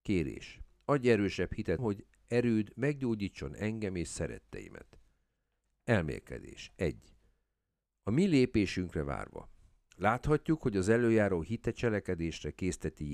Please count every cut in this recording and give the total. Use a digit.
1